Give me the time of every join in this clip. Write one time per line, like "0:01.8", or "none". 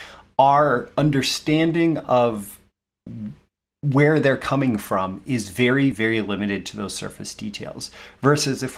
0:05.9